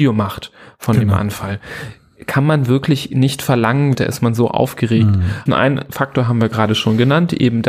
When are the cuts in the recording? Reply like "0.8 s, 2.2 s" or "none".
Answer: 3.9 s, 5.5 s